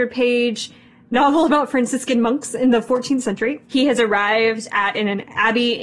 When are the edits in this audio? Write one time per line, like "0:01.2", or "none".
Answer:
0:03.6